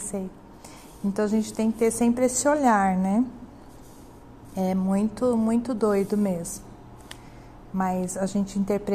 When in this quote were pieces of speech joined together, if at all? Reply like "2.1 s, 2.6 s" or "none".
1.0 s